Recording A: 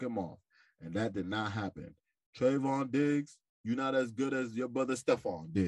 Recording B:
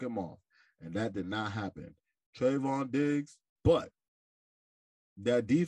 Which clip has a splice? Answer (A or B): B